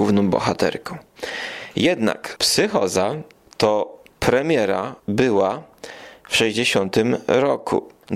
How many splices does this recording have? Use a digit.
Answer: 2